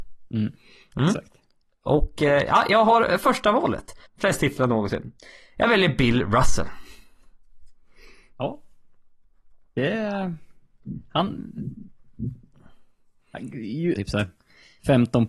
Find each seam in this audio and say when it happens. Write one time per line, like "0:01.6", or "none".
0:04.0
0:14.0